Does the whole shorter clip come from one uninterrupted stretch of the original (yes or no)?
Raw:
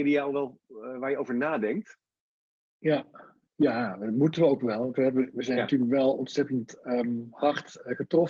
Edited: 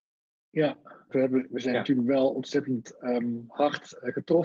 no